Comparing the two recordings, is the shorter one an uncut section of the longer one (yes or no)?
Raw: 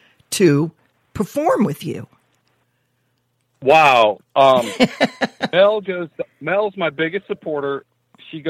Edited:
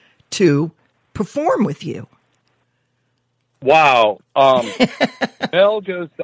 yes